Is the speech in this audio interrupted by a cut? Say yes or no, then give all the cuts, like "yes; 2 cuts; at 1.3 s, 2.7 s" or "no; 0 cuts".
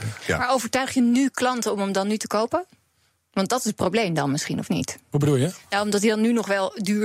no; 0 cuts